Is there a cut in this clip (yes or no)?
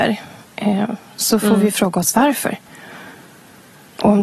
no